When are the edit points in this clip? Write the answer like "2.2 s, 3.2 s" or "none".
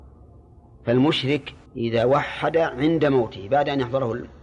1.7 s

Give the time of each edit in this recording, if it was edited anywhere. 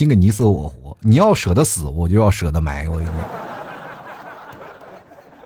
none

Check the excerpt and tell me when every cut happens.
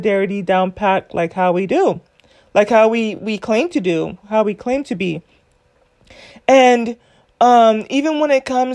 none

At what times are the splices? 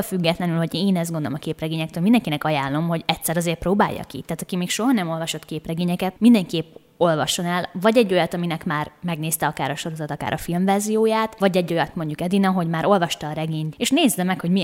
11.9 s, 13.7 s

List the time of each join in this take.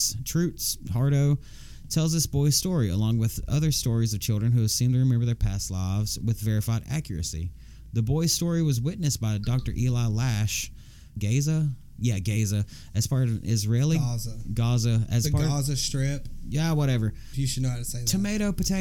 11.2 s, 17.3 s

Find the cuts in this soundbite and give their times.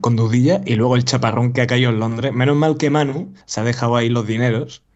3.4 s

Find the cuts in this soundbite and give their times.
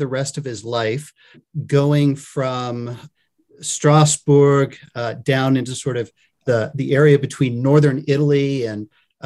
none

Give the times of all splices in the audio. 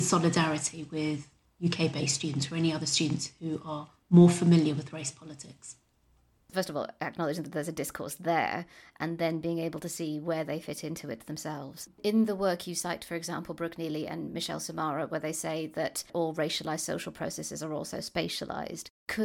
6.5 s

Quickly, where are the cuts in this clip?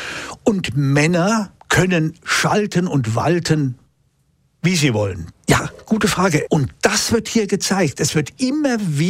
1.6 s, 5.3 s, 6.5 s

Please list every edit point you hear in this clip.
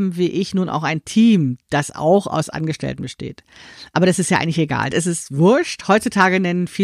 4.9 s

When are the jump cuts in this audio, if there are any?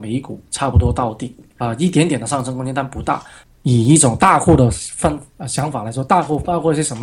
1.6 s, 3.4 s

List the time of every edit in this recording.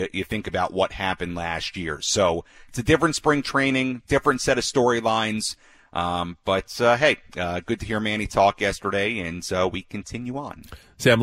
none

